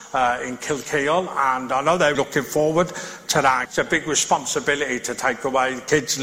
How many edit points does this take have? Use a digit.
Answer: 2